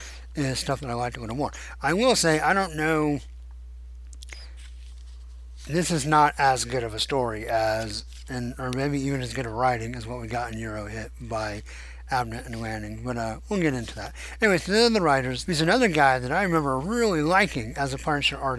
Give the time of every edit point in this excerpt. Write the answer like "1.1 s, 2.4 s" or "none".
15.4 s